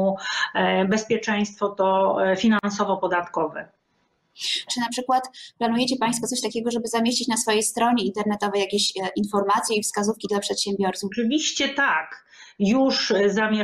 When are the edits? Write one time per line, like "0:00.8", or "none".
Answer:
0:04.7
0:11.1